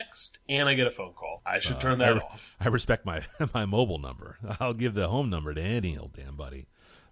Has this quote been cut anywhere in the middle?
yes; 1 cut; at 1.4 s

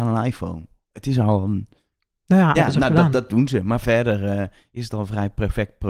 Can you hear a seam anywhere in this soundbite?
yes; 1 cut; at 2.5 s

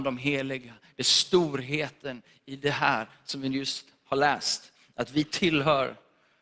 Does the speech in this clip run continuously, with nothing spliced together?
yes; 0 cuts

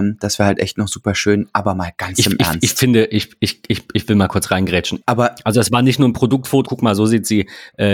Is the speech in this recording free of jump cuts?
no; 2 cuts; at 5.0 s, 6.6 s

